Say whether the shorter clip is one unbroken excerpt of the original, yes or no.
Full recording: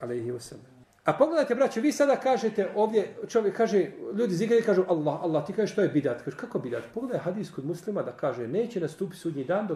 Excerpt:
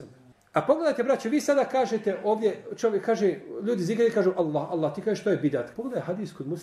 no